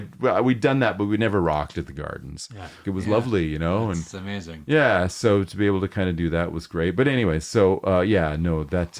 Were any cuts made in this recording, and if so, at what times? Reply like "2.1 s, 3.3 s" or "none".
2.8 s